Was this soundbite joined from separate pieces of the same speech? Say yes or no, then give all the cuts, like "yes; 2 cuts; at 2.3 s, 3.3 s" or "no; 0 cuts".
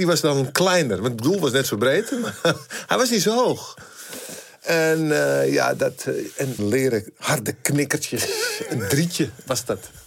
yes; 1 cut; at 6.6 s